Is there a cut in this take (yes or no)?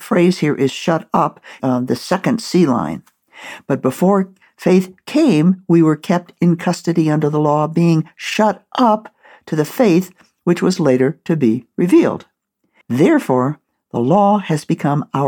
yes